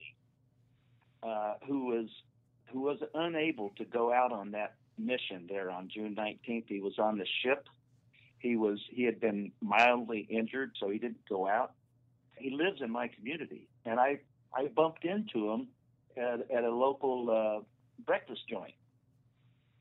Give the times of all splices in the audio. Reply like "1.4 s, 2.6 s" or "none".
12.4 s

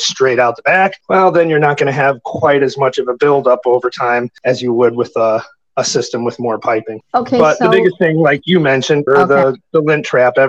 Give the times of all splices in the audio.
9.1 s

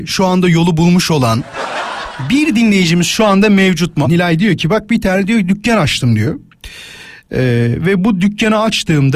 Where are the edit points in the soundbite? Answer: 4.0 s

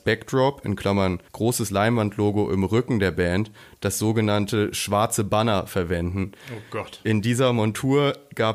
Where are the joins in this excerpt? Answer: 1.3 s

